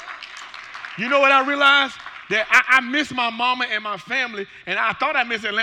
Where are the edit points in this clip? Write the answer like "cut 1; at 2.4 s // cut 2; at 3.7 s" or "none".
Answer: none